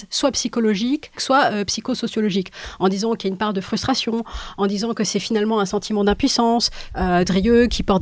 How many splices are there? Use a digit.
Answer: 2